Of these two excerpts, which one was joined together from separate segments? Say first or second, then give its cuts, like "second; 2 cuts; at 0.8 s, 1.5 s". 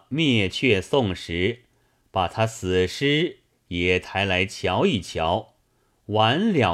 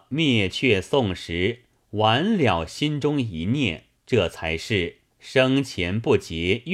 second; 3 cuts; at 1.8 s, 4.0 s, 5.1 s